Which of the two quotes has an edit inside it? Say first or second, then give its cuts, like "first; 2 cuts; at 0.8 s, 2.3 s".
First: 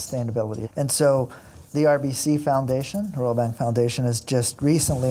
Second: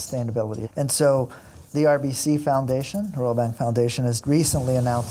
second; 1 cut; at 4.2 s